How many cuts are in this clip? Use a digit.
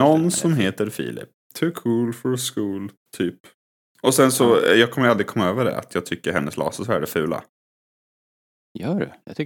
1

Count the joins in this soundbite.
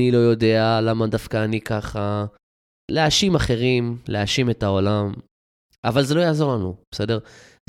1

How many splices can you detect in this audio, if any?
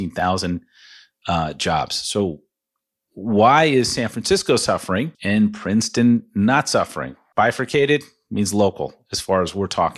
2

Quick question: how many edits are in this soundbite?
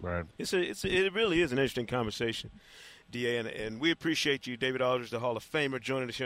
0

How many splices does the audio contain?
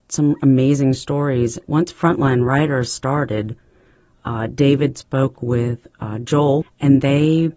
2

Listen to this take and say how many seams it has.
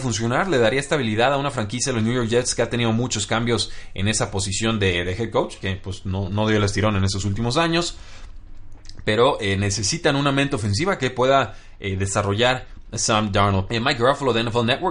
2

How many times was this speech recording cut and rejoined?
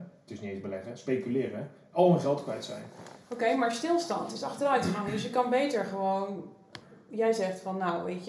1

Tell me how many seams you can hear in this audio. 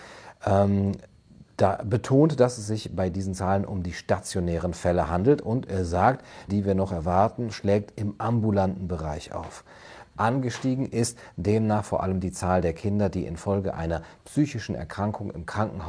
2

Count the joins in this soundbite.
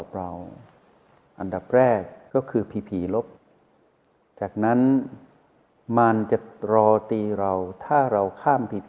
0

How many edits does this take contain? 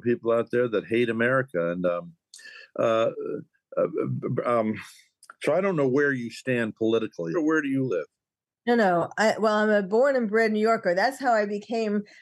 1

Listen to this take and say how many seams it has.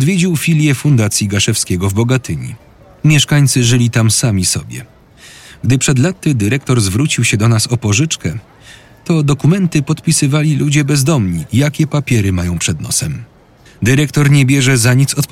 2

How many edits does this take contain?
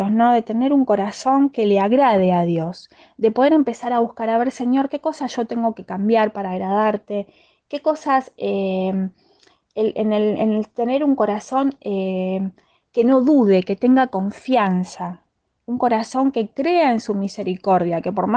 0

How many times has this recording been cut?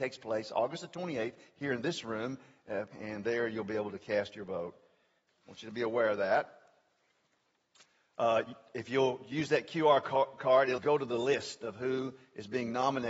3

